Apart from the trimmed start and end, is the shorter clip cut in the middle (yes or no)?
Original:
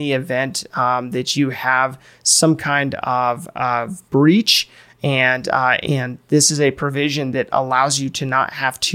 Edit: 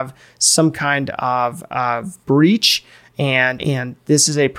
yes